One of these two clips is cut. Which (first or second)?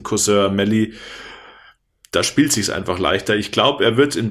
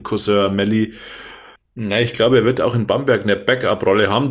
second